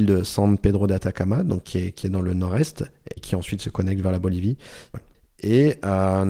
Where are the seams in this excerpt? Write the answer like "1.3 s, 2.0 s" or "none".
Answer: 3.2 s, 4.9 s